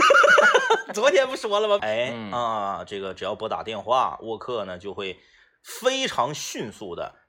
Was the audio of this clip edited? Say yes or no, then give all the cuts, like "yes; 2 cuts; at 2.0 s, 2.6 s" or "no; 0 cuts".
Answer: yes; 1 cut; at 1.8 s